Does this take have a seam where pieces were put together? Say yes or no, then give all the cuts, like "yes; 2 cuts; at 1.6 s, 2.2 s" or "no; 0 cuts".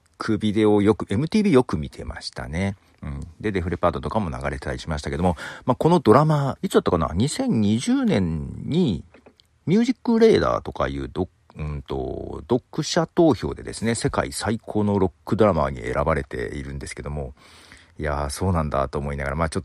yes; 1 cut; at 6.6 s